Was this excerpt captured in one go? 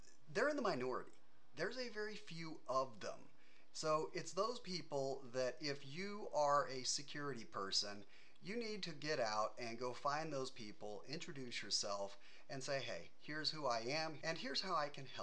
no; 1 cut; at 14.2 s

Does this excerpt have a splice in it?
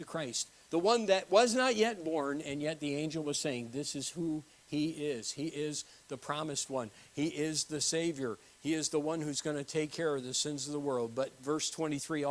no; 0 cuts

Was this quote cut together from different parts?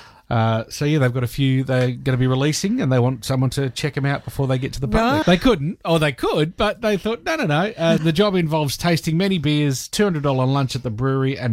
yes; 2 cuts; at 5.2 s, 8.0 s

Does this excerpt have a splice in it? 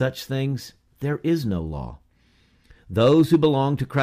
no; 0 cuts

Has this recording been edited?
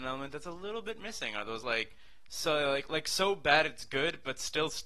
no; 0 cuts

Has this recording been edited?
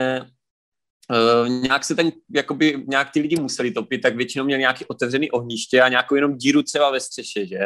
no; 0 cuts

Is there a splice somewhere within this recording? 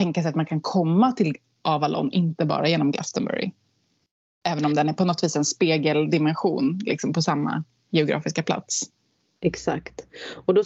no; 0 cuts

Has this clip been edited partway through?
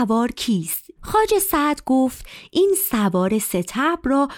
yes; 1 cut; at 1.0 s

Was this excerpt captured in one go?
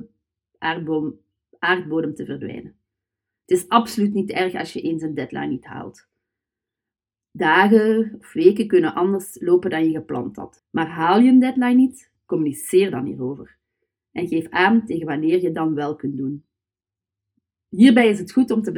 no; 1 cut; at 10.6 s

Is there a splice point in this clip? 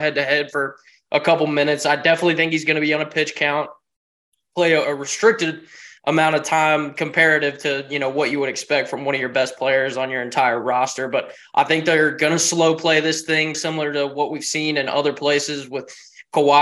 yes; 2 cuts; at 4.8 s, 13.5 s

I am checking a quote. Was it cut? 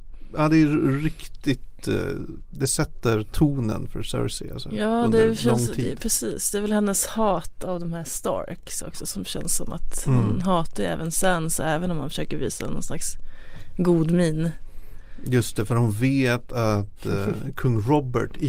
no; 0 cuts

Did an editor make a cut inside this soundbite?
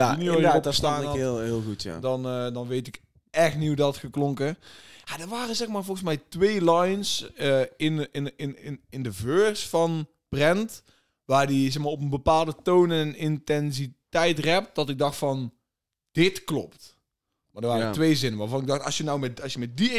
no; 0 cuts

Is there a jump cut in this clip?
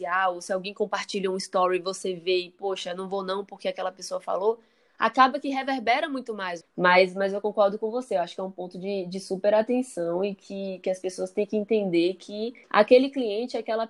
yes; 2 cuts; at 6.6 s, 12.6 s

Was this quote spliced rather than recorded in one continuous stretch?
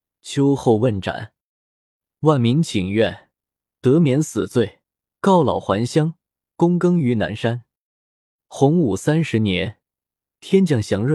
no; 0 cuts

